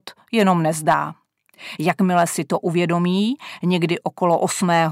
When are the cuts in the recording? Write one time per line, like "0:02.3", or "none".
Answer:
none